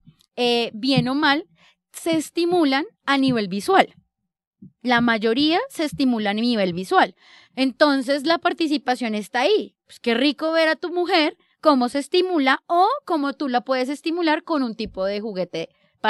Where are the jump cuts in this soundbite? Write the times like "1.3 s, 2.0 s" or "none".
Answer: none